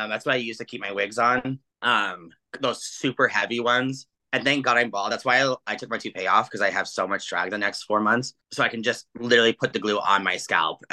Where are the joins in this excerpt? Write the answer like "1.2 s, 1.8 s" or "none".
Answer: none